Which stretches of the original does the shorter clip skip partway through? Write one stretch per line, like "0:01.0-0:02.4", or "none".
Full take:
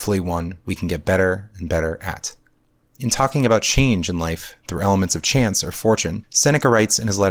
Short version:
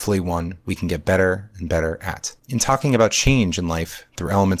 0:02.4-0:02.9